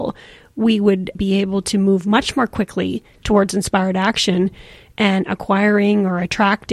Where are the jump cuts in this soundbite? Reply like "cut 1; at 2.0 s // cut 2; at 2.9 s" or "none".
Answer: cut 1; at 1.1 s